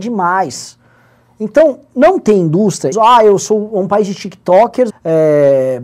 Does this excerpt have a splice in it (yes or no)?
yes